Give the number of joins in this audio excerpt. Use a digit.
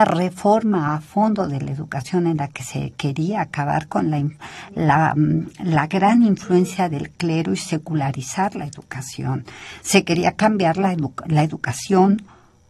1